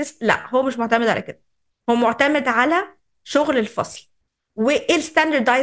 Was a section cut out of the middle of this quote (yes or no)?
no